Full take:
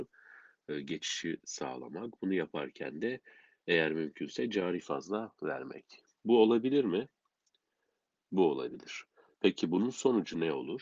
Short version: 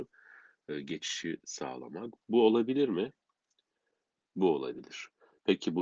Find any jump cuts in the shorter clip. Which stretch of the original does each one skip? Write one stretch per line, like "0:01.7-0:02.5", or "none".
0:02.2-0:06.1